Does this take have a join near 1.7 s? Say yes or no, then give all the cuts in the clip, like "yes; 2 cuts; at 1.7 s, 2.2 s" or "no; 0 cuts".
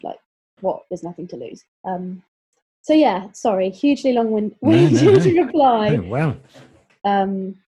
yes; 1 cut; at 1.7 s